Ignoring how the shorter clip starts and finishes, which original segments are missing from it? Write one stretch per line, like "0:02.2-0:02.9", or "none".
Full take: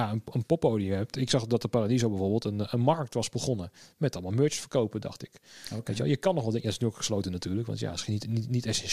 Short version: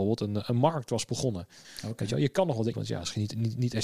0:03.9-0:05.5
0:06.6-0:07.7